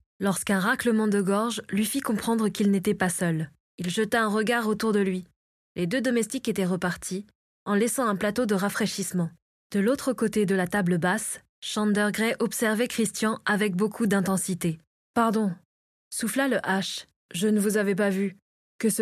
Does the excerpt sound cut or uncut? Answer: uncut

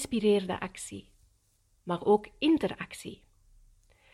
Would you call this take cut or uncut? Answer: cut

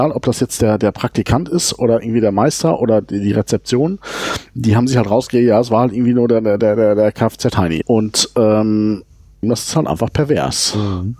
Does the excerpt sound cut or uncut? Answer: cut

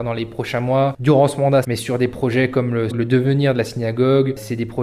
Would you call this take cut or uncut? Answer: cut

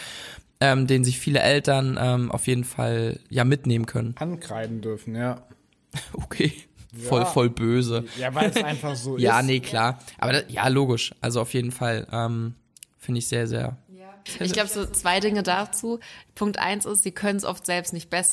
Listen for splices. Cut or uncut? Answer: uncut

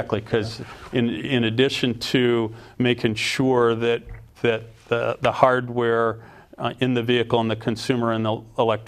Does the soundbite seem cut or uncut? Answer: uncut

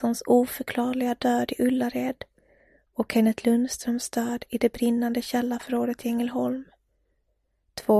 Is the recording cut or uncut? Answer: uncut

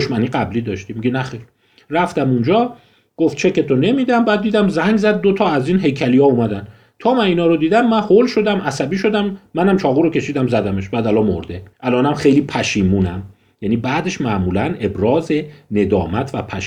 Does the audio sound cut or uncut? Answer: cut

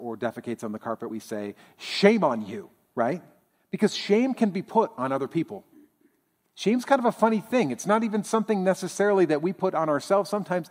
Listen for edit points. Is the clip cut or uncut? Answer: uncut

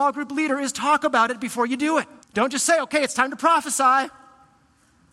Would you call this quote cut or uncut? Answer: cut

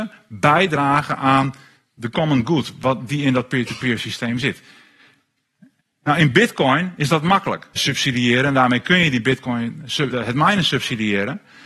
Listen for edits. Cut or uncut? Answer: cut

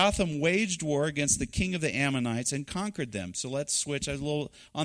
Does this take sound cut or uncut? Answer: uncut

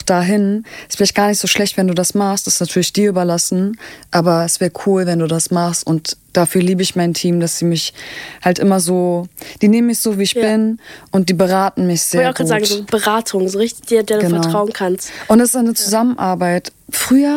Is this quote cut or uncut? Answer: uncut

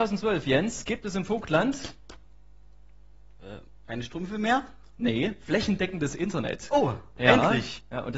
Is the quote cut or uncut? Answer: uncut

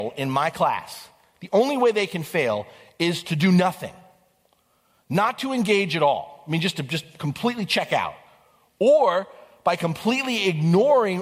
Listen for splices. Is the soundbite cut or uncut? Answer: uncut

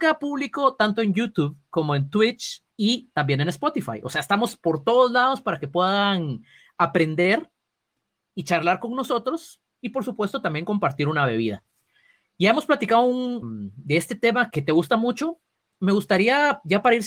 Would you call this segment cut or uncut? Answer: cut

